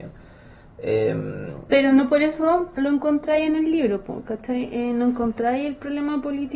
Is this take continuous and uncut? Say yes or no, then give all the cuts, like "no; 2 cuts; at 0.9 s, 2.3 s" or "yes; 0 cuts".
yes; 0 cuts